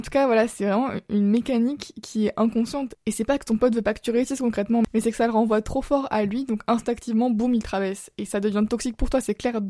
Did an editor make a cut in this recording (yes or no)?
no